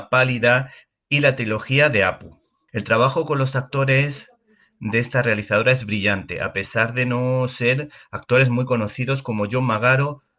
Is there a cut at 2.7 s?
yes; 1 cut; at 2.7 s

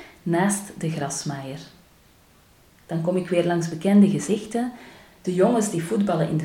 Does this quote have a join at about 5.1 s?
no; 1 cut; at 2.6 s

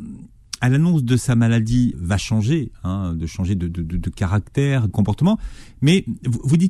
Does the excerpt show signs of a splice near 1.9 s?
yes; 2 cuts; at 1.9 s, 4.9 s

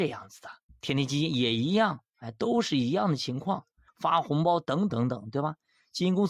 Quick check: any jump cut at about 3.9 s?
yes; 2 cuts; at 3.9 s, 4.9 s

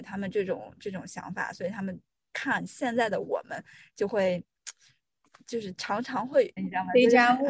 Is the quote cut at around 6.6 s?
yes; 1 cut; at 6.6 s

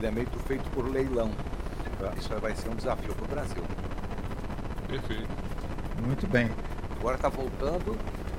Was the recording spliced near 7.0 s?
yes; 2 cuts; at 2.2 s, 7.0 s

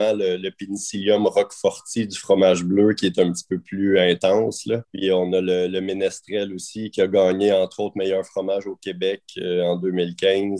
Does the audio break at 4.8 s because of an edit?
yes; 1 cut; at 4.8 s

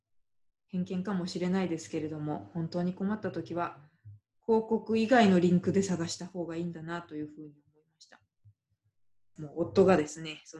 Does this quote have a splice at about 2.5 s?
no; 1 cut; at 9.4 s

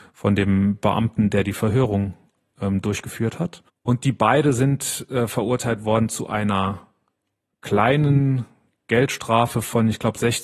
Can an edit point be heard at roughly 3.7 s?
yes; 1 cut; at 3.7 s

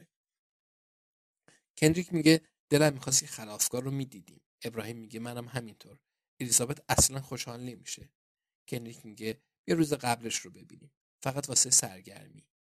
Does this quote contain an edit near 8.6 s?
no; 1 cut; at 4.5 s

